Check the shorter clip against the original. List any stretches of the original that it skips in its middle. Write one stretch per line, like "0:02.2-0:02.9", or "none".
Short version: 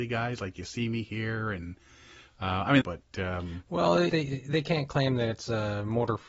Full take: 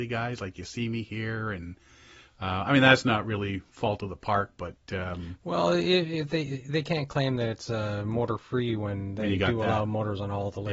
0:02.8-0:04.5
0:05.8-0:06.3